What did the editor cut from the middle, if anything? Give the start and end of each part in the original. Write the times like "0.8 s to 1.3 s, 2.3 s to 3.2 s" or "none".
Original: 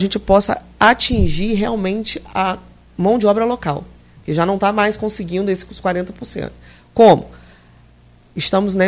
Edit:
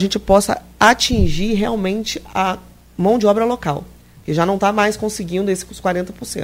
none